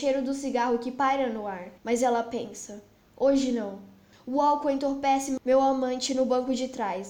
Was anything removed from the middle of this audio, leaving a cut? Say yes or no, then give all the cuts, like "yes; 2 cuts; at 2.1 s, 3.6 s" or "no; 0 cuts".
yes; 2 cuts; at 1.8 s, 4.1 s